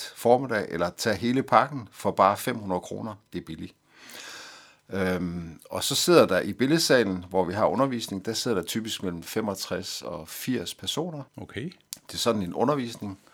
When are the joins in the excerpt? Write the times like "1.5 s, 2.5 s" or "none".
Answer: 11.3 s